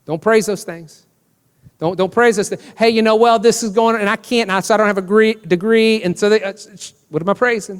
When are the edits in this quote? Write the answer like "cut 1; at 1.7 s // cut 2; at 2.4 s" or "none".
none